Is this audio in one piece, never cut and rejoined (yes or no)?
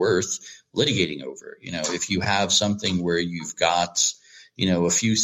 yes